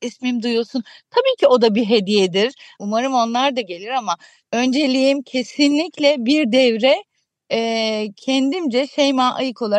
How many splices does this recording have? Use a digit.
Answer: 1